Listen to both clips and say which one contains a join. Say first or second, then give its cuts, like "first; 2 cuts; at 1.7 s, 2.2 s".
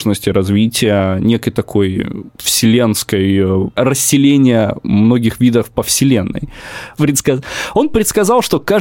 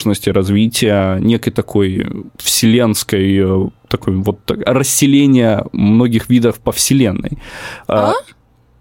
first; 2 cuts; at 3.8 s, 7.0 s